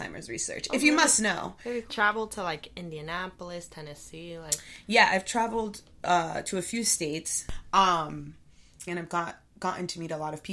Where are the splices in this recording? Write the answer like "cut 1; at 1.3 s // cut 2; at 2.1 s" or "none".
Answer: cut 1; at 1.9 s // cut 2; at 8.9 s